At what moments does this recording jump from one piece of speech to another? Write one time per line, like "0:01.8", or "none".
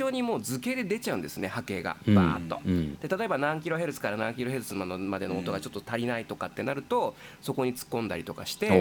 none